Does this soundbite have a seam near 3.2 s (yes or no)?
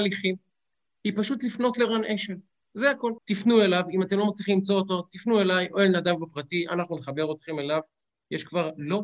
yes